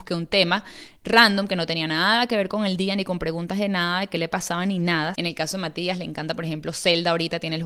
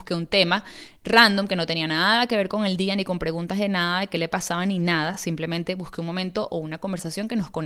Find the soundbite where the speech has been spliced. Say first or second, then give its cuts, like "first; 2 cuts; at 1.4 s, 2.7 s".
first; 1 cut; at 5.1 s